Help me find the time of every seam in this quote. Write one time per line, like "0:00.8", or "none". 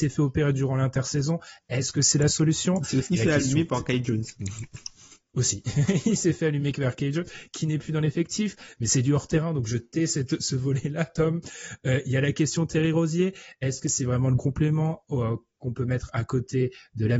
0:14.4